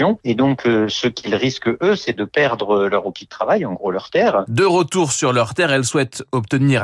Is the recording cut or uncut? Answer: cut